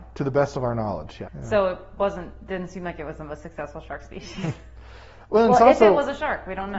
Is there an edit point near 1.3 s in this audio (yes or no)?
yes